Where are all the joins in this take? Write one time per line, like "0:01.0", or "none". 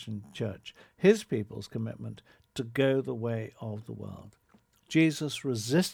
none